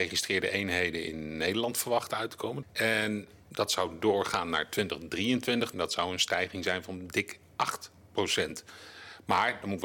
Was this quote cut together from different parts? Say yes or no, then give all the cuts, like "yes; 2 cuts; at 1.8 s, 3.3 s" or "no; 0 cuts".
yes; 2 cuts; at 2.6 s, 5.7 s